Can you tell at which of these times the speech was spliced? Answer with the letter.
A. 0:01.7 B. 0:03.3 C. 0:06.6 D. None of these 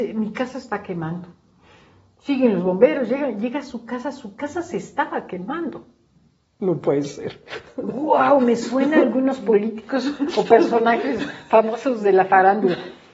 C